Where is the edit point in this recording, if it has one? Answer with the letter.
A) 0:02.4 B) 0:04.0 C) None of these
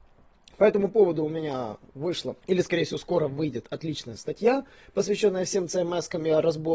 A